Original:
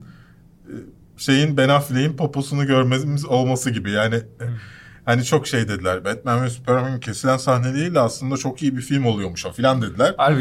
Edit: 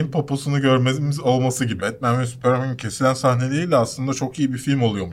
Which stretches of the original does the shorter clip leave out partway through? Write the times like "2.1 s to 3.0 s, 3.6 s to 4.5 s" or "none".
3.8 s to 6.0 s